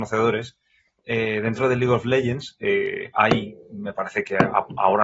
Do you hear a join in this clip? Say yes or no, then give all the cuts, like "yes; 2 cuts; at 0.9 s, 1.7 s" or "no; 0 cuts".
no; 0 cuts